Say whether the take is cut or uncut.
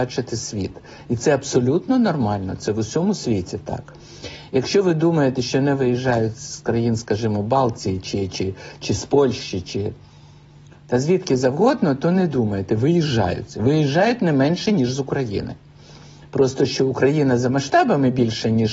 uncut